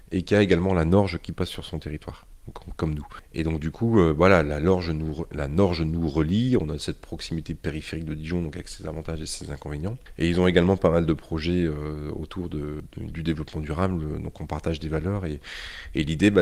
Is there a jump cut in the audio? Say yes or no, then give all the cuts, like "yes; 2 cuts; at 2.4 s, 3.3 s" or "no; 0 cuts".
no; 0 cuts